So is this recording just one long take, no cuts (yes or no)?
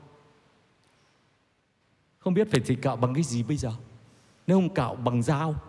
yes